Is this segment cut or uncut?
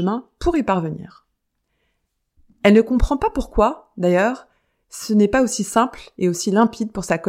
uncut